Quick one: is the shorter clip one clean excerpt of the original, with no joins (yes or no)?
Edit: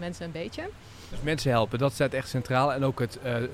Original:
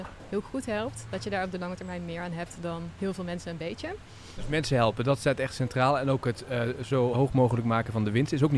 yes